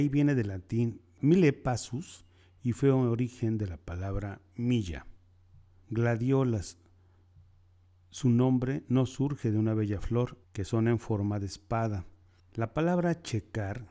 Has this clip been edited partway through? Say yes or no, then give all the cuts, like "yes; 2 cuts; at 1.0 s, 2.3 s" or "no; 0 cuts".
yes; 2 cuts; at 10.4 s, 12.4 s